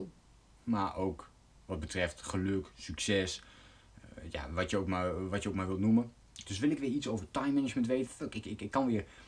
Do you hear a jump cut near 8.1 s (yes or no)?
yes